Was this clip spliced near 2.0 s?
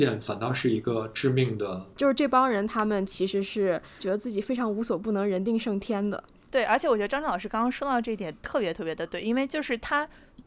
yes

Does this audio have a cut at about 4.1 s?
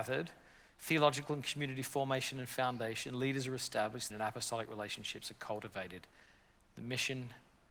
yes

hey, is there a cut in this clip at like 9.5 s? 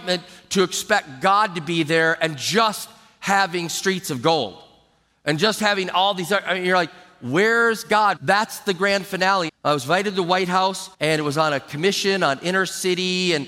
yes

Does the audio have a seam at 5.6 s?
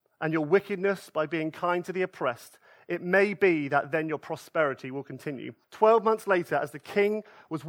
yes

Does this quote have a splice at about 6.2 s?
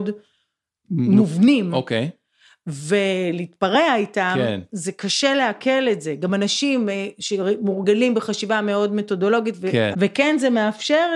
no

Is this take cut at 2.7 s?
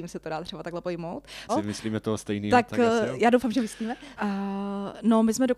no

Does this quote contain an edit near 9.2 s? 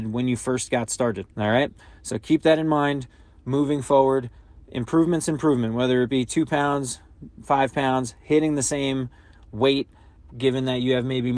no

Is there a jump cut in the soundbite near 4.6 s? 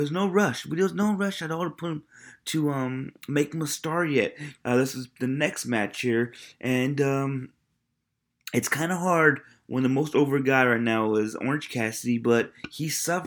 yes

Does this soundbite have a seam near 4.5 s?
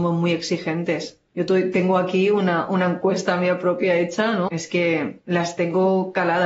yes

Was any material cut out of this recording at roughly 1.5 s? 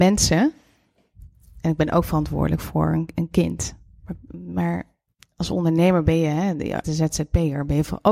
no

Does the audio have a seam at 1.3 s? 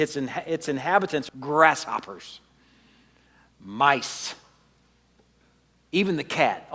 yes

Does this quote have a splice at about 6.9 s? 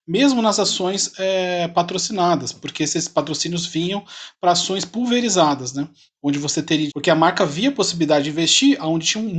yes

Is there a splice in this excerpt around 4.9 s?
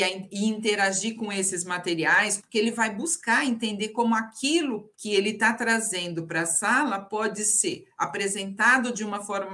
yes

